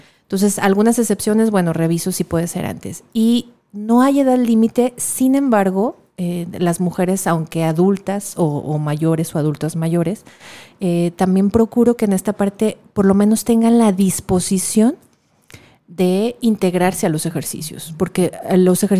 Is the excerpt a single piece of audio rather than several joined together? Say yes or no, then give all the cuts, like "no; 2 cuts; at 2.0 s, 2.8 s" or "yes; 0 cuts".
yes; 0 cuts